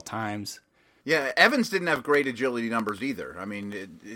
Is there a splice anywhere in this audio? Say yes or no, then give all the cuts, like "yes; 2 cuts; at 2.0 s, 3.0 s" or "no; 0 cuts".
yes; 1 cut; at 1.0 s